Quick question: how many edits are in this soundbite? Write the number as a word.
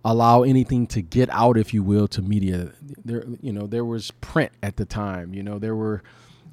zero